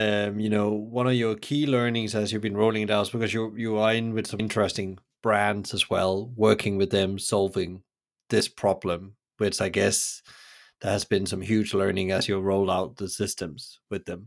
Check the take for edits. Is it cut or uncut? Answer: cut